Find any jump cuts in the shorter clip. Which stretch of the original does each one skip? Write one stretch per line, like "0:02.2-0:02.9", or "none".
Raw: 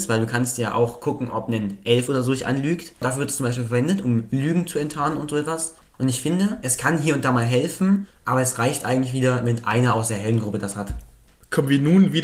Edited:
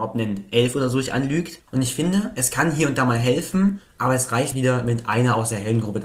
0:02.9-0:05.9
0:08.8-0:09.1